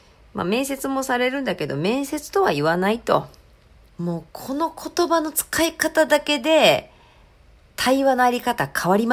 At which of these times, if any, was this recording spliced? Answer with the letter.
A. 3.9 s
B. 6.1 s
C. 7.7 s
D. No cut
A